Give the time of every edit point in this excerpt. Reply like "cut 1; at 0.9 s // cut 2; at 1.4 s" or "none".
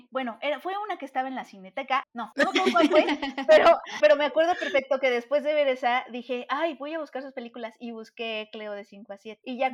cut 1; at 2.0 s // cut 2; at 4.0 s